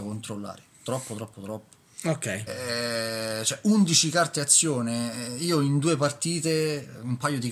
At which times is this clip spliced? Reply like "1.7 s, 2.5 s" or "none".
2.5 s